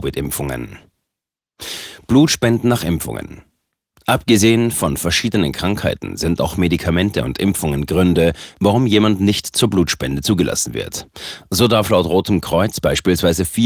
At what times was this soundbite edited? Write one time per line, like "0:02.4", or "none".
none